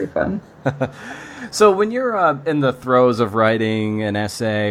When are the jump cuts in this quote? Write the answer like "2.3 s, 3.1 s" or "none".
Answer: none

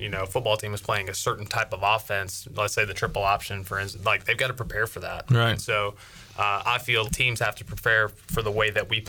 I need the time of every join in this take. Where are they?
7.0 s

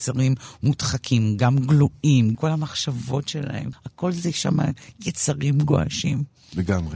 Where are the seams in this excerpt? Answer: 2.3 s, 3.7 s

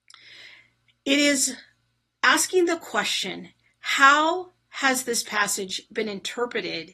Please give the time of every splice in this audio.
none

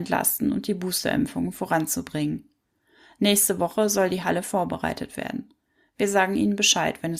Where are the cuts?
none

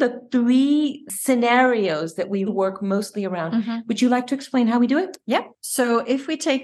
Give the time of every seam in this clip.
2.5 s

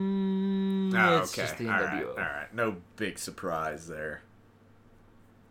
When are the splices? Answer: none

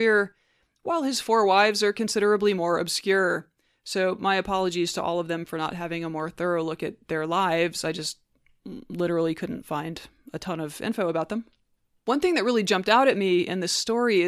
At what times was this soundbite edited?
none

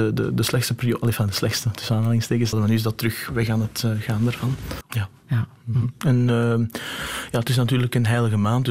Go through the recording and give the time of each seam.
2.5 s, 4.8 s, 6.0 s

